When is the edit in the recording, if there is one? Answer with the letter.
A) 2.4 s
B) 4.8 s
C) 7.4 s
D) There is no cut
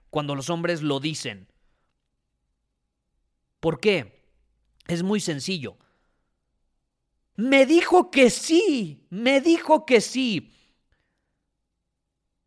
C